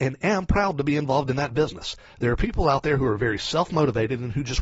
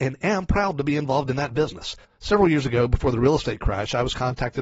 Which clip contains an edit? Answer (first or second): second